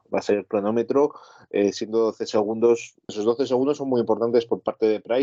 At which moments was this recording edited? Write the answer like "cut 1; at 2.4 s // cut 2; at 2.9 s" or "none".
cut 1; at 3.1 s